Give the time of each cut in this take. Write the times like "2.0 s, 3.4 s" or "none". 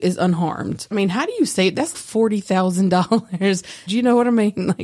0.9 s, 1.9 s, 3.9 s